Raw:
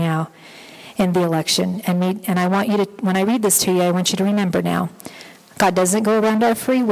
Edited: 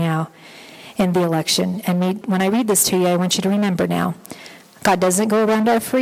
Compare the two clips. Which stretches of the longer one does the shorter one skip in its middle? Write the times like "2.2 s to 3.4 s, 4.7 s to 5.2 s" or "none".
2.2 s to 3.0 s

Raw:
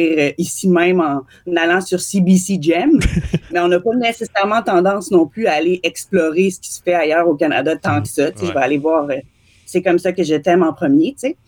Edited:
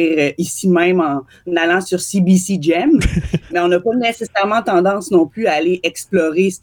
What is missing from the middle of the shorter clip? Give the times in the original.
none

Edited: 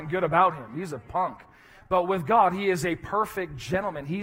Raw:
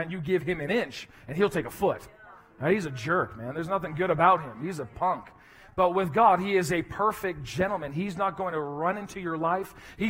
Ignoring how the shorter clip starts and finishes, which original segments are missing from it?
none

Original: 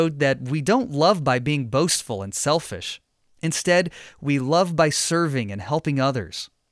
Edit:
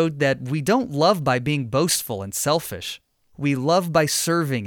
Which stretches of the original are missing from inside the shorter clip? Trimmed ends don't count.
3.3 s to 4.2 s

